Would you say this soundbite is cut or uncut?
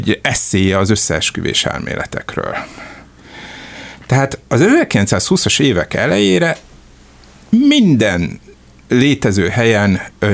uncut